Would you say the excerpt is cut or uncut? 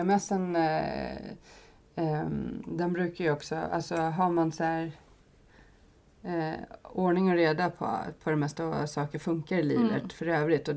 uncut